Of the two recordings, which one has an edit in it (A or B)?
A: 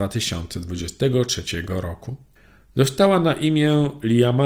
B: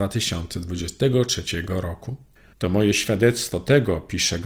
B